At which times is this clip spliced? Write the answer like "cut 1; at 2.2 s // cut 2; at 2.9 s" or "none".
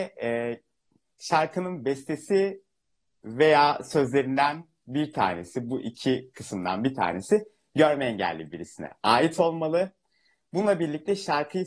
none